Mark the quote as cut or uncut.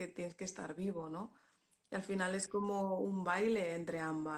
uncut